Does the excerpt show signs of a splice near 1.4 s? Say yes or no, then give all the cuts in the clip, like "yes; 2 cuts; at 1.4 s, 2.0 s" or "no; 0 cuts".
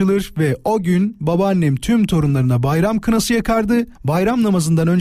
no; 1 cut; at 4.0 s